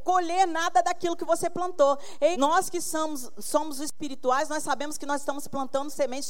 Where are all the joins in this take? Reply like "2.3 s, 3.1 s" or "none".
2.3 s

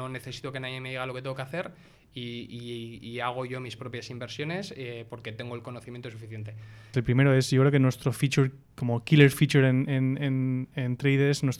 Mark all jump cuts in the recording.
6.9 s

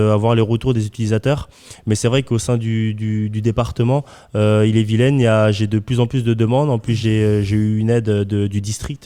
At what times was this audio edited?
none

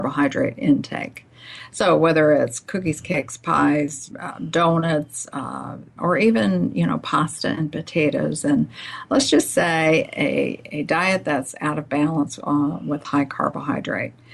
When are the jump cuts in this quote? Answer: 4.1 s, 6.0 s

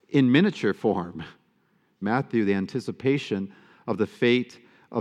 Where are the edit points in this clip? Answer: 2.0 s

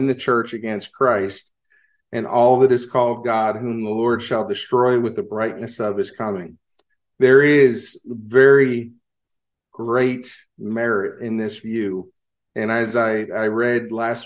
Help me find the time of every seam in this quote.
none

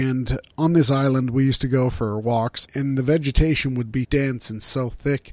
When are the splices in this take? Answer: 2.6 s, 4.0 s

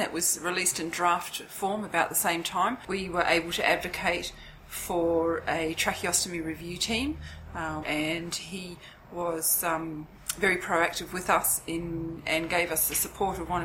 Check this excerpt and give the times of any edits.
7.8 s, 12.2 s

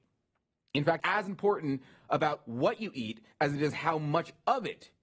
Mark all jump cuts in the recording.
1.0 s

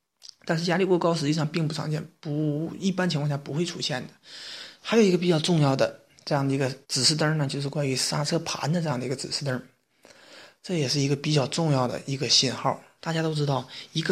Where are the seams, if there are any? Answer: 6.8 s, 13.0 s

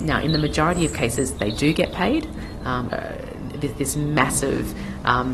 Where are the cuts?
2.9 s

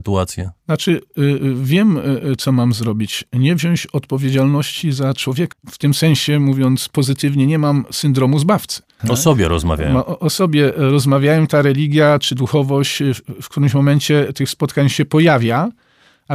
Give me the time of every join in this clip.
5.5 s, 9.0 s

